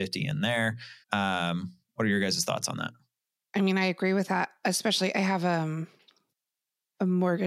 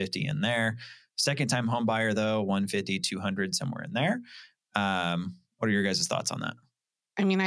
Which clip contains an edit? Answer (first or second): first